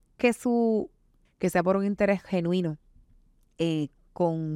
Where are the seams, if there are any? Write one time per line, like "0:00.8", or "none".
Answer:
0:01.3